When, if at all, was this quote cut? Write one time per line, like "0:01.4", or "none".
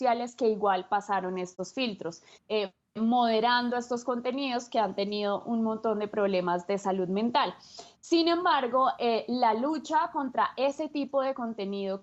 0:02.3